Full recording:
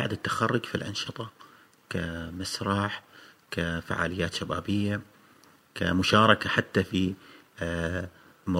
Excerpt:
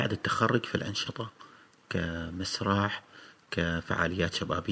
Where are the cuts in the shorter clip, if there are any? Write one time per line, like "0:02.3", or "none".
none